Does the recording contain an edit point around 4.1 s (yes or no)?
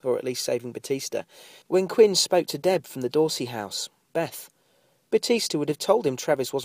yes